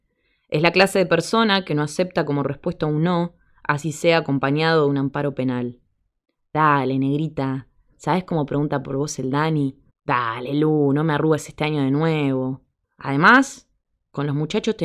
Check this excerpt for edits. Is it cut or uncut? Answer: cut